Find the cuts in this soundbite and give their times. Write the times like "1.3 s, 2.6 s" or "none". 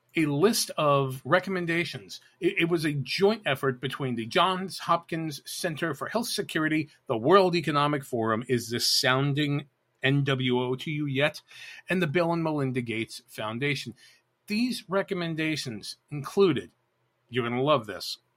none